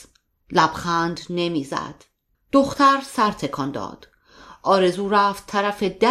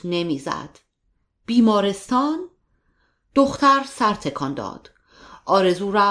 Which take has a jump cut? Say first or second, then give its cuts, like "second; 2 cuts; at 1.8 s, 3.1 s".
first; 1 cut; at 2.3 s